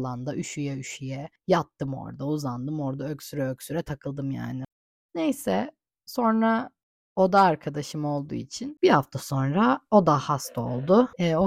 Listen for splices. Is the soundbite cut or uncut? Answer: uncut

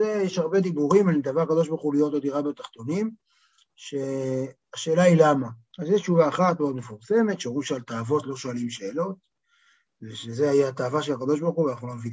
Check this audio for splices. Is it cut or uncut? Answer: uncut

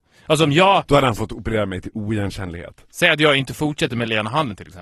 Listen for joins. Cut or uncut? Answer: uncut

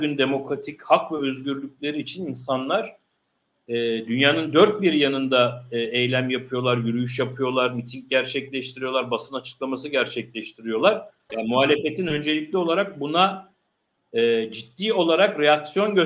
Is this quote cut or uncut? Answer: cut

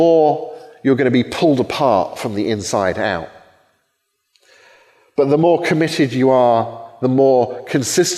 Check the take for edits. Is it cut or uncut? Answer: uncut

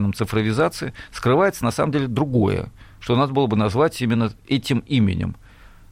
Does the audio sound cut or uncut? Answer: uncut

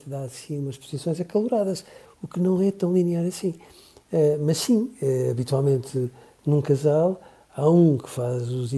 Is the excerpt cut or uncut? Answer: cut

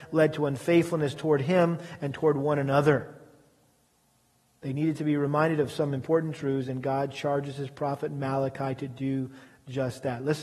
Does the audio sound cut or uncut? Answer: uncut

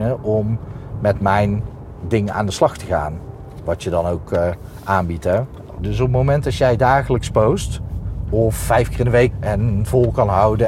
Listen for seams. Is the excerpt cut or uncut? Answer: cut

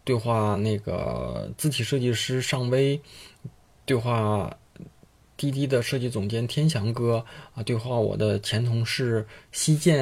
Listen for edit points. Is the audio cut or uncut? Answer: uncut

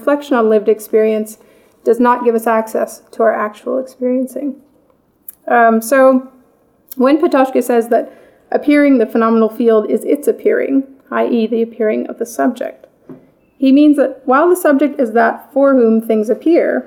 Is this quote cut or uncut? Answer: uncut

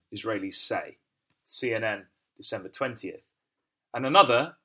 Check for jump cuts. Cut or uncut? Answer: uncut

